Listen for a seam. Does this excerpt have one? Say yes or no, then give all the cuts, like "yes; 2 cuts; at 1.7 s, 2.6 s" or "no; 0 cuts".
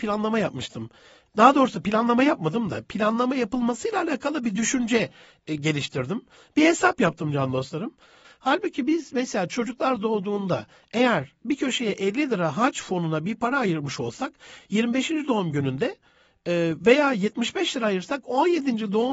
yes; 1 cut; at 8.2 s